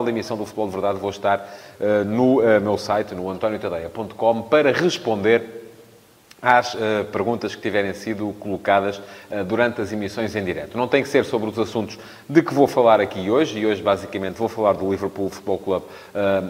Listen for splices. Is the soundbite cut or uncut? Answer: uncut